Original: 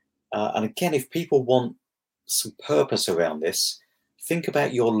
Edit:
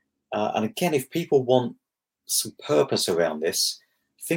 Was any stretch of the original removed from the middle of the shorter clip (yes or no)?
no